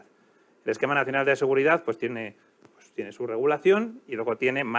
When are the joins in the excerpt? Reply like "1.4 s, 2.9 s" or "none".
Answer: none